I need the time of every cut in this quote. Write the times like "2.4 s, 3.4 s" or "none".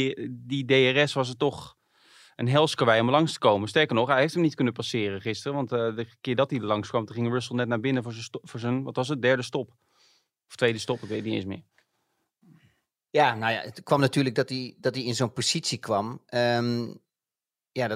none